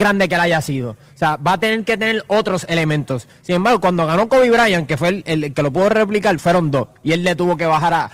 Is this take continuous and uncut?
yes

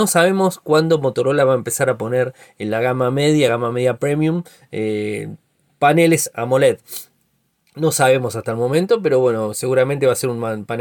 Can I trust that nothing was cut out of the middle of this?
yes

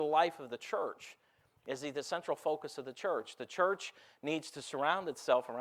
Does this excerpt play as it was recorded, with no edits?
yes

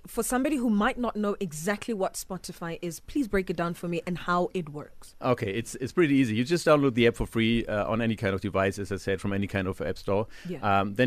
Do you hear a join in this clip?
no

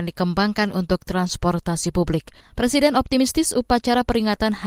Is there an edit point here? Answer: yes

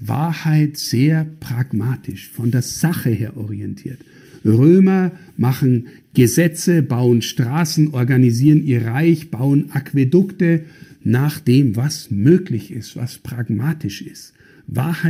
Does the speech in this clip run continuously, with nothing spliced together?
yes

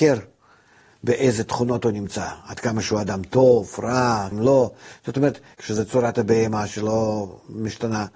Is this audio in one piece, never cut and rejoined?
no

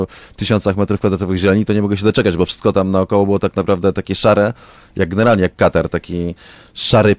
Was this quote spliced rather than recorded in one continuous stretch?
no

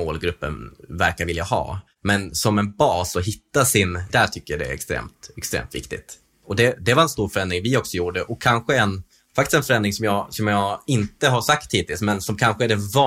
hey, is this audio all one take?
no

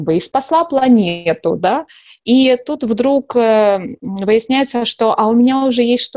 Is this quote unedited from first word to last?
yes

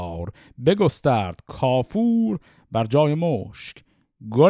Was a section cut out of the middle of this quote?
no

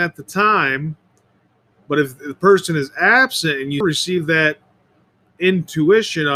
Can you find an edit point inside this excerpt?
yes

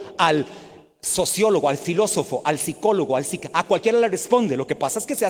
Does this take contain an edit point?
no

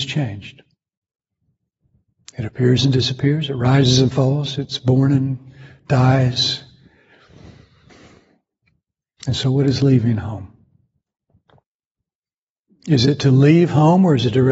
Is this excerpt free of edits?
yes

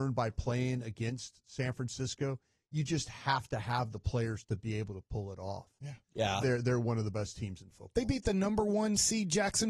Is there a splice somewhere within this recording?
yes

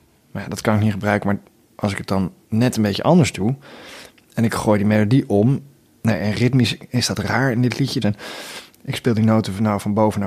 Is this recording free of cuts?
no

